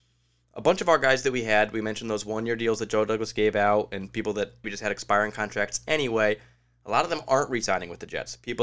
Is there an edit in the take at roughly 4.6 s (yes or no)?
yes